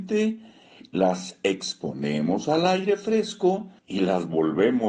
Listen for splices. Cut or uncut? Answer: cut